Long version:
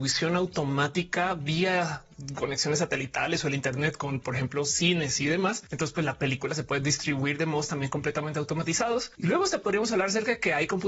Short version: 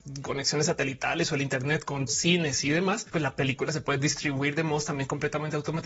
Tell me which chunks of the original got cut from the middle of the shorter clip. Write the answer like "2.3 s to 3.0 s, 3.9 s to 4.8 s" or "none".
4.2 s to 4.6 s, 5.7 s to 5.9 s